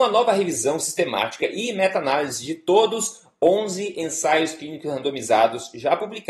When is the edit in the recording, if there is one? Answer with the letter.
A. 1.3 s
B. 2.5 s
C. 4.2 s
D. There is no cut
D